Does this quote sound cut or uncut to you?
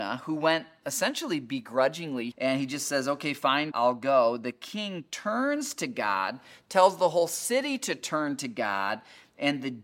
cut